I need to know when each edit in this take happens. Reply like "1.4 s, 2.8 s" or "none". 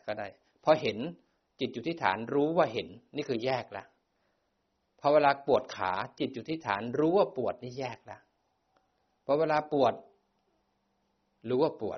none